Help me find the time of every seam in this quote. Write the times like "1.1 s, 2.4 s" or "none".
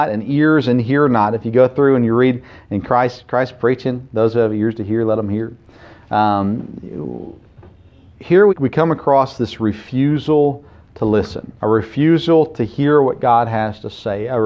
8.5 s, 11.6 s